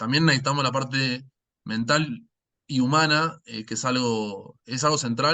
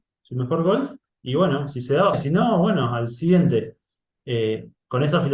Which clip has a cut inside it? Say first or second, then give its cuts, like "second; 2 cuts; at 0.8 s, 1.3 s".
second; 1 cut; at 2.1 s